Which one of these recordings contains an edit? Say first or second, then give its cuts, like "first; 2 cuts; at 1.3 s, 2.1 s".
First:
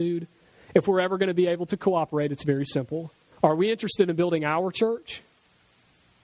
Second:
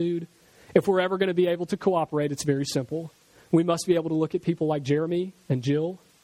first; 1 cut; at 3.3 s